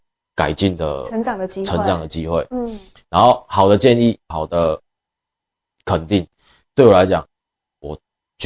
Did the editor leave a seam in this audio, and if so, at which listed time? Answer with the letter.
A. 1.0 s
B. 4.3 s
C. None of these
B